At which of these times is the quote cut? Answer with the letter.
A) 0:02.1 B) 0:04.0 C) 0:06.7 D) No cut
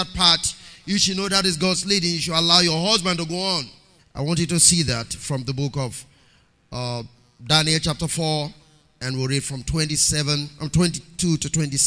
B